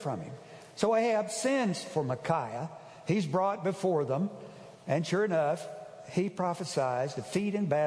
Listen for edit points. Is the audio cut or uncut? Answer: uncut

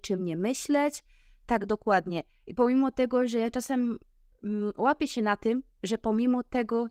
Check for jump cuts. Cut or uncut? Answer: uncut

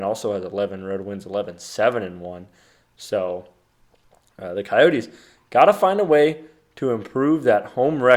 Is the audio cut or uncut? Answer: uncut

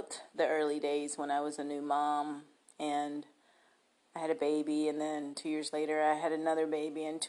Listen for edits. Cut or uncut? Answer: uncut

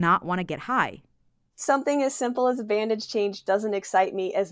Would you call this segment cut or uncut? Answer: cut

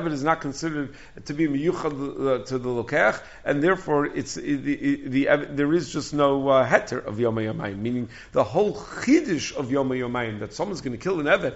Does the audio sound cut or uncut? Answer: uncut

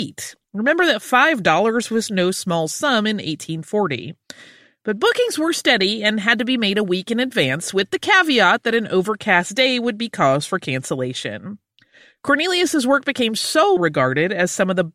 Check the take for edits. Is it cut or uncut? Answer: cut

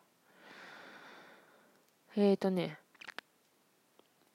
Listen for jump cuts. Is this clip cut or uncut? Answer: uncut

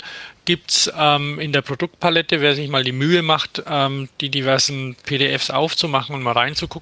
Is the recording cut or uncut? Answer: uncut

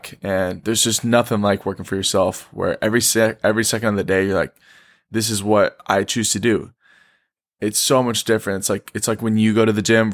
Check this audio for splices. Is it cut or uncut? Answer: uncut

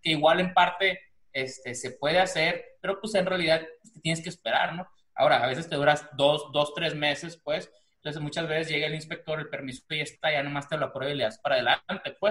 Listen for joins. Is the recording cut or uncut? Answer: uncut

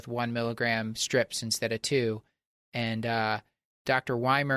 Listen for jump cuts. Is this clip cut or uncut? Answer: uncut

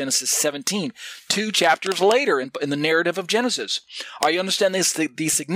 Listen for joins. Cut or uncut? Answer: uncut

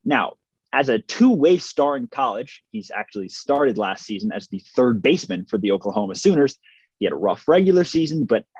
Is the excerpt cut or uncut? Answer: cut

